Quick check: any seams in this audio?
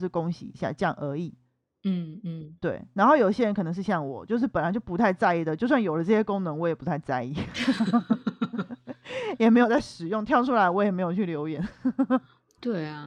no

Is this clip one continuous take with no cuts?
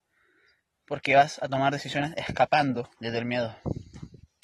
no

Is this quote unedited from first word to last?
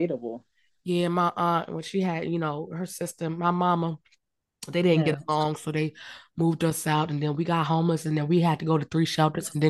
yes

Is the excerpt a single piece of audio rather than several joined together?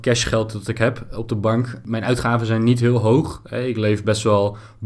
yes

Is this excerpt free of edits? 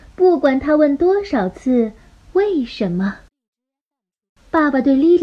yes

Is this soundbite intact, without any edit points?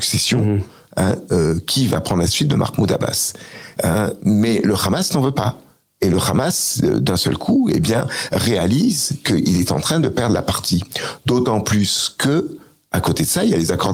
no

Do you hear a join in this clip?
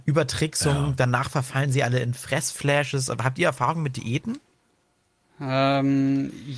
no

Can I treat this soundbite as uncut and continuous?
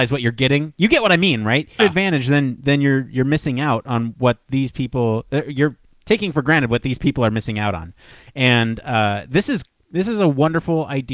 no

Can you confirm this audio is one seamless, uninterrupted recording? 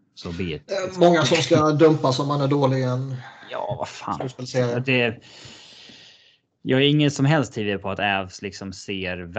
yes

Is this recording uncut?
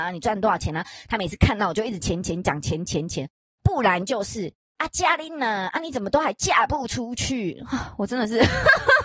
no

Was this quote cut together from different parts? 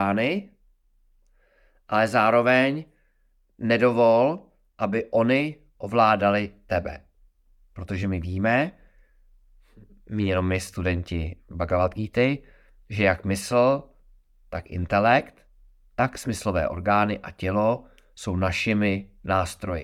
no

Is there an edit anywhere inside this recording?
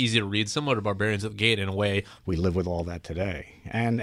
yes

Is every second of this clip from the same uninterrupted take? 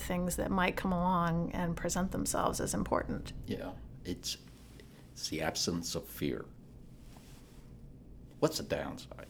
no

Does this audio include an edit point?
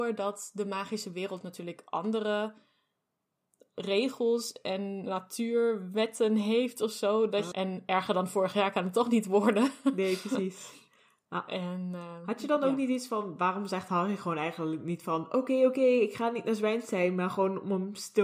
yes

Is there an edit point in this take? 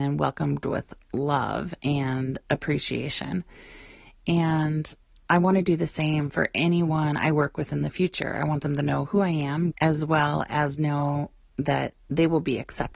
yes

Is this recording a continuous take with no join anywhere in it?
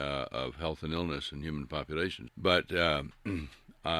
no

